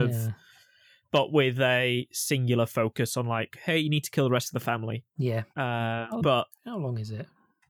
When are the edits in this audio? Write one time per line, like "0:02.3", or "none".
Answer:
0:05.1
0:06.2